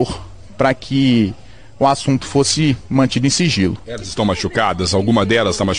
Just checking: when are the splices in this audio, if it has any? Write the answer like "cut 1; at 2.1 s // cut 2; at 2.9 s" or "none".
none